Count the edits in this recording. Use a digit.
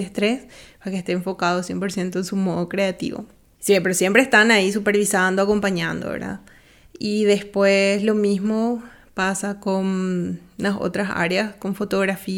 0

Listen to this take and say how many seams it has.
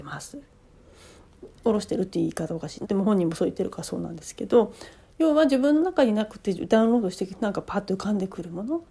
1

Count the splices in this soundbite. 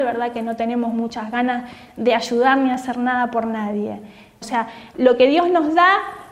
1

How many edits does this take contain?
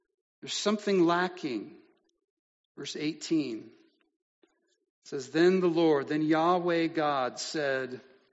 0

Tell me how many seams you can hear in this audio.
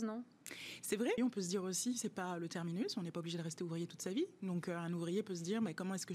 1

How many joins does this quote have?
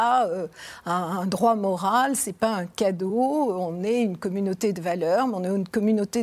0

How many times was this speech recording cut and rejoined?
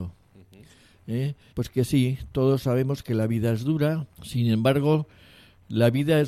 2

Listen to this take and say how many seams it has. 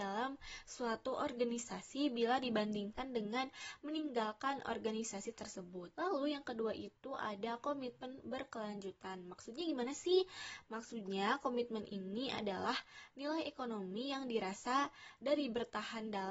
1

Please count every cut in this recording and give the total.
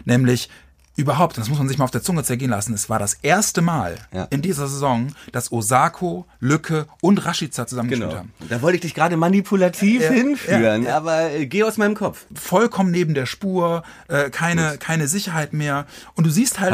1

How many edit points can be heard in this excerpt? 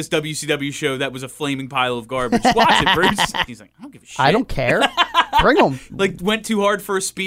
2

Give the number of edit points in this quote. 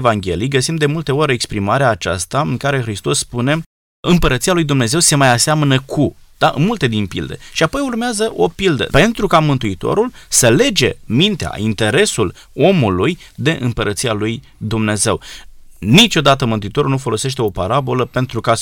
2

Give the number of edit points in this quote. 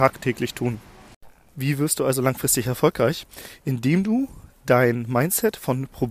0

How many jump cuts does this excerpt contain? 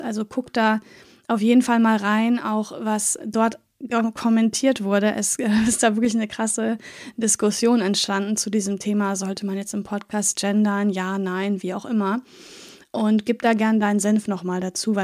0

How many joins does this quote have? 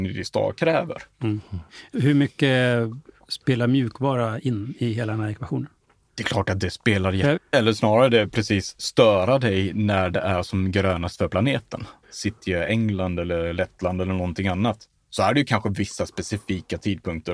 2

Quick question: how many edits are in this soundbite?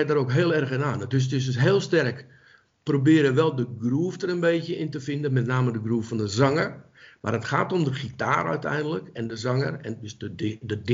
0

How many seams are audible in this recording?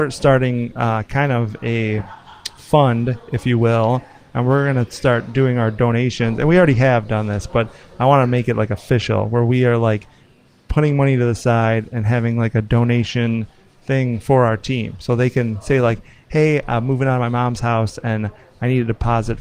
0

